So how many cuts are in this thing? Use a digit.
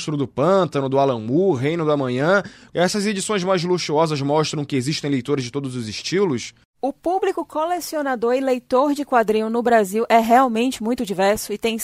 1